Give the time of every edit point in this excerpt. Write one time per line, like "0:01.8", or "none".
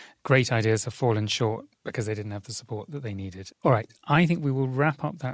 0:03.5